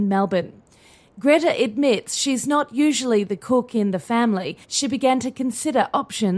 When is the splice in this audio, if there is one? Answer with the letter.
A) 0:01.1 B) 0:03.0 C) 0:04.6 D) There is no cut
C